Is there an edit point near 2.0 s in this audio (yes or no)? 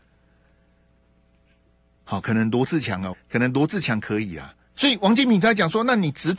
yes